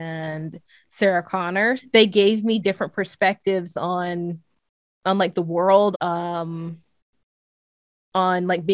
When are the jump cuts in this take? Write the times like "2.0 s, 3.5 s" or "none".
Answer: 1.8 s, 5.9 s